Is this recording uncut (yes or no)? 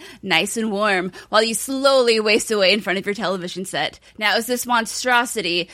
no